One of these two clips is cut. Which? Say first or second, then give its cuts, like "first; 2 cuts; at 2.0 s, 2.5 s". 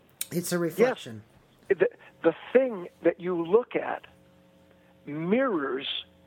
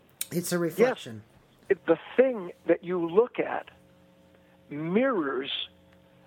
second; 1 cut; at 1.8 s